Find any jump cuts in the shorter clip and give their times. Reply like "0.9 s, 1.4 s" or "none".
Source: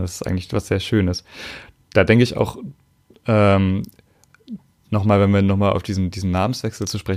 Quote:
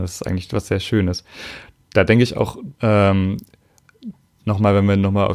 2.7 s